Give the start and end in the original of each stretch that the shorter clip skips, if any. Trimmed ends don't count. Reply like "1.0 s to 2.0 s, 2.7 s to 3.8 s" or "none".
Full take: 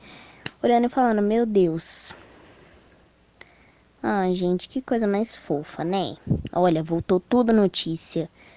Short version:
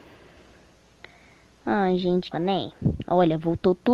4.7 s to 5.8 s